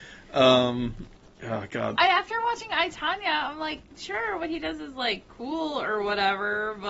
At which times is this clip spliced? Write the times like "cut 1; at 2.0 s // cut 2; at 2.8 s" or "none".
cut 1; at 2.0 s